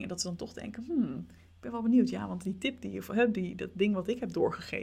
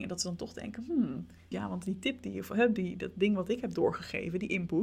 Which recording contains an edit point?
second; 1 cut; at 1.5 s

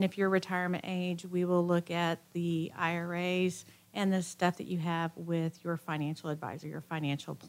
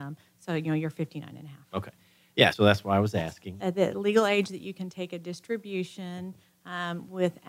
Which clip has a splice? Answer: second; 2 cuts; at 2.5 s, 3.6 s

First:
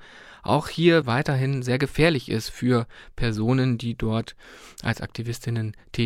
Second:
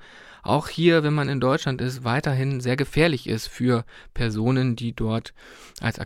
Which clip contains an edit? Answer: first; 1 cut; at 1.0 s

